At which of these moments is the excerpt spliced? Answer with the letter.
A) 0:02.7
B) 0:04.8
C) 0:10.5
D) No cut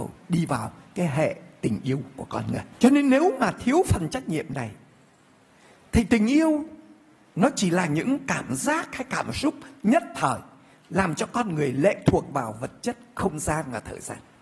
A